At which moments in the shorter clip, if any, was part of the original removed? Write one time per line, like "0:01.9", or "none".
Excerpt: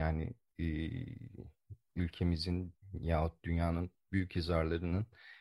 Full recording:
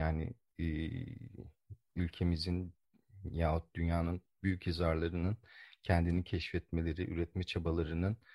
0:02.8